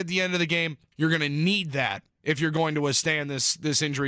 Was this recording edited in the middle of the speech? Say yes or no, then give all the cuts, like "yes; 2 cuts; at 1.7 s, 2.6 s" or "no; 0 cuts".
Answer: yes; 2 cuts; at 0.9 s, 2.1 s